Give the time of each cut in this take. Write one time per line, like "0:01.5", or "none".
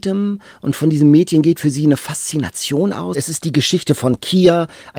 0:03.1